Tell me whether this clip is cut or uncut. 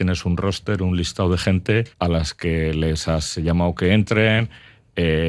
cut